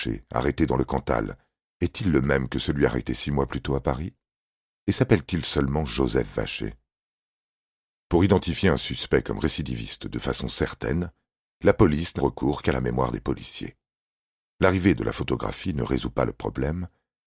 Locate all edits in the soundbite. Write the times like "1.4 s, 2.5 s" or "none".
12.2 s